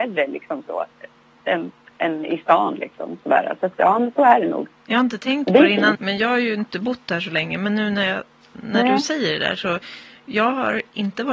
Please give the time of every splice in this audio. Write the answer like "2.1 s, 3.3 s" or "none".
5.9 s